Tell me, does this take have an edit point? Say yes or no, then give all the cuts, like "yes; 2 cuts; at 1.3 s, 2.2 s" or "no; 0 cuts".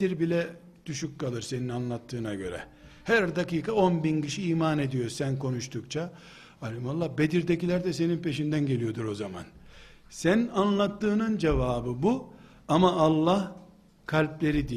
no; 0 cuts